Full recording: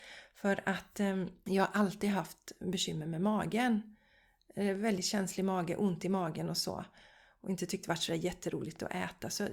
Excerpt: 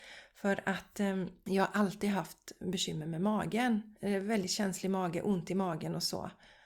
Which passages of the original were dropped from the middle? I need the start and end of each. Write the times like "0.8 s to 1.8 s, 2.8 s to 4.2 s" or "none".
4.0 s to 4.5 s